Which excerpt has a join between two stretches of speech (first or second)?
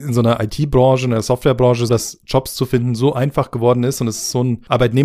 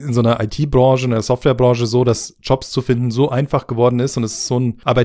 first